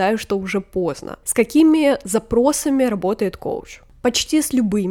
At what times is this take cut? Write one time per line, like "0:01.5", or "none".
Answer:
0:01.2